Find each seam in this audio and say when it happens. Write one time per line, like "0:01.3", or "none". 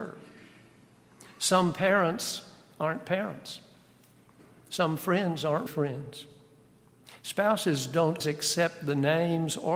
0:05.7
0:08.2